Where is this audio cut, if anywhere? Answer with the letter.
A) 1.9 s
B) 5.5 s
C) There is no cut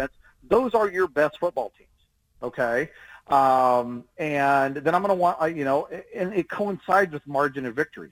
C